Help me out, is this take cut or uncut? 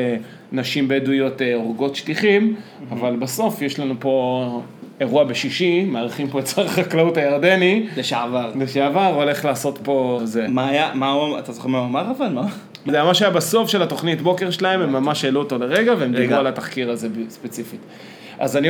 cut